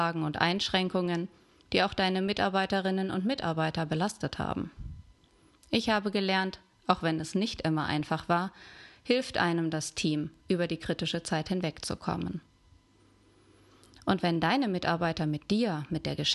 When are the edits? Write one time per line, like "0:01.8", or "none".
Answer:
none